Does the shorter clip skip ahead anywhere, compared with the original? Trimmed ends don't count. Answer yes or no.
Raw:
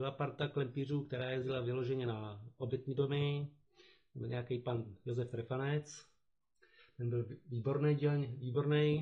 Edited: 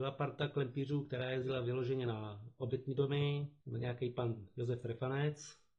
yes